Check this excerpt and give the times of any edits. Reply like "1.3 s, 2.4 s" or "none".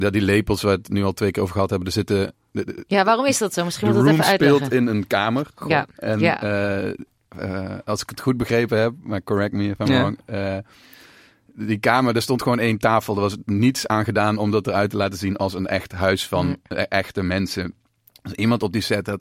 none